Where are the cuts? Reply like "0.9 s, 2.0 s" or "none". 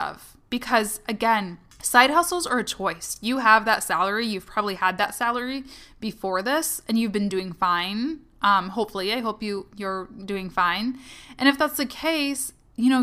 none